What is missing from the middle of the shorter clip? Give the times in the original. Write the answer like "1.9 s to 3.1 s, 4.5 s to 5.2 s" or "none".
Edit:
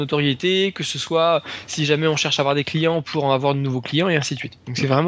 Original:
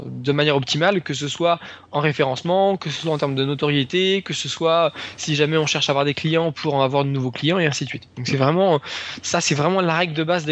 none